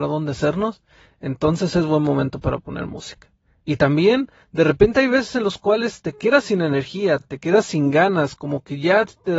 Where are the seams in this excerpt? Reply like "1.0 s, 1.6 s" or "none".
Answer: none